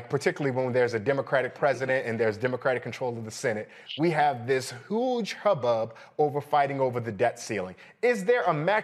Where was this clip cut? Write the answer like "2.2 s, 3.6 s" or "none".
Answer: none